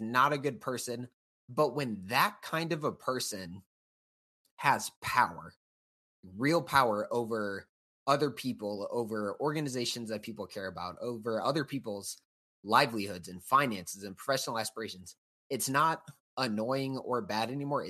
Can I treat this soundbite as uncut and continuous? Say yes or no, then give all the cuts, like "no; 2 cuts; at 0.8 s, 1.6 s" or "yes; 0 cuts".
yes; 0 cuts